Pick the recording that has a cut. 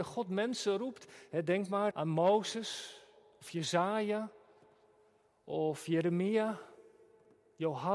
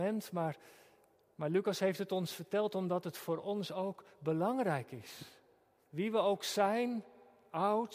first; 1 cut; at 1.9 s

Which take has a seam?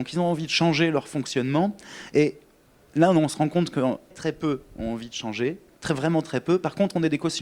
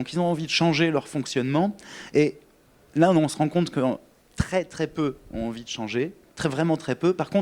first; 1 cut; at 4.1 s

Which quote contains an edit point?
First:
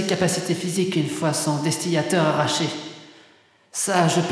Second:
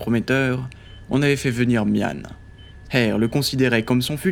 second; 1 cut; at 2.8 s

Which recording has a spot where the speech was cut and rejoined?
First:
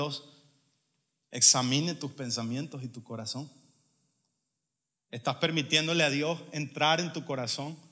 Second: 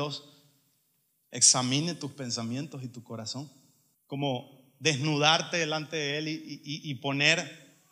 second; 1 cut; at 3.9 s

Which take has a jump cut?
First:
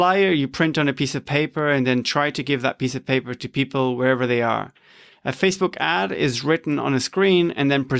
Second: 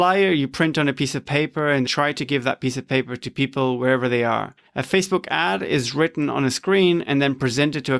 second; 2 cuts; at 1.9 s, 4.7 s

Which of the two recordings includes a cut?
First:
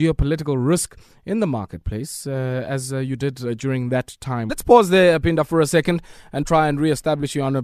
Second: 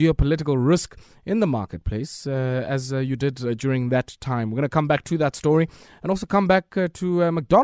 first; 2 cuts; at 4.5 s, 6.4 s

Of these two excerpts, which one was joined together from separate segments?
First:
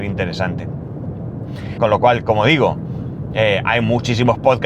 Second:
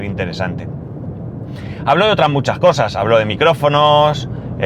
first; 1 cut; at 1.8 s

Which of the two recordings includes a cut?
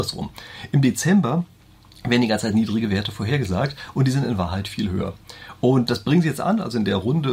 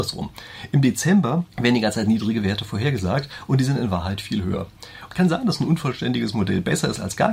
second; 2 cuts; at 1.5 s, 5.1 s

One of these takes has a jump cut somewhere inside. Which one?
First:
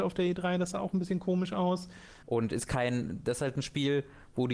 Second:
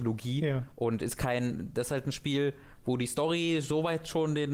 first; 1 cut; at 2.2 s

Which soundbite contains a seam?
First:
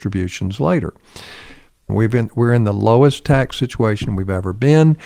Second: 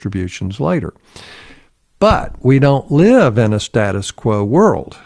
first; 1 cut; at 1.9 s

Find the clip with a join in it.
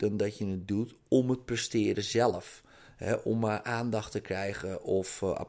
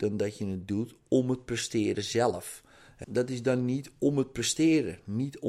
second; 1 cut; at 3.0 s

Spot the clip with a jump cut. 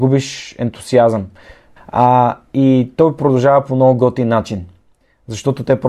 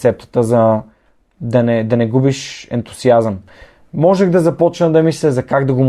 first; 1 cut; at 1.8 s

